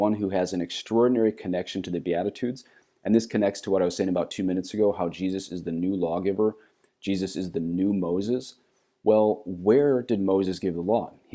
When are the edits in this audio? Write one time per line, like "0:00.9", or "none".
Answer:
none